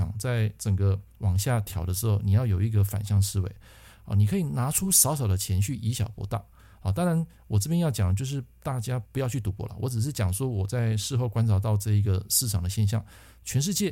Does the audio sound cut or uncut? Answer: uncut